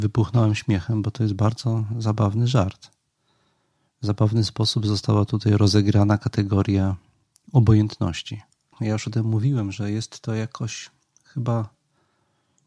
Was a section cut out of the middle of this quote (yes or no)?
yes